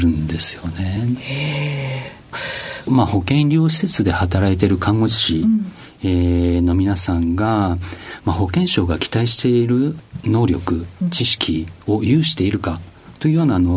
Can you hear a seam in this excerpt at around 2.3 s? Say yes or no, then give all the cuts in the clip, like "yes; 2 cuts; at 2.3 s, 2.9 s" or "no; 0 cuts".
yes; 1 cut; at 2.3 s